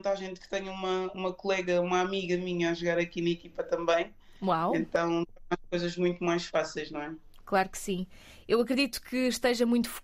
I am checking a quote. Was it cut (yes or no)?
no